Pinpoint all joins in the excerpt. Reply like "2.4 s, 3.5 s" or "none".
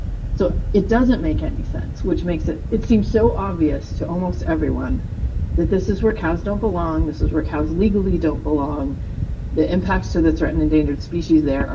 2.7 s